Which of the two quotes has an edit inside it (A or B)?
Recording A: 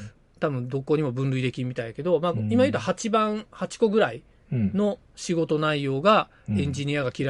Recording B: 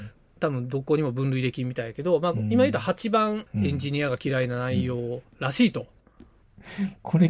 B